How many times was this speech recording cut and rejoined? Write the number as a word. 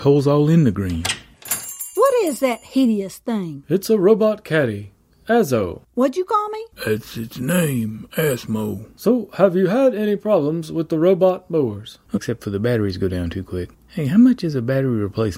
one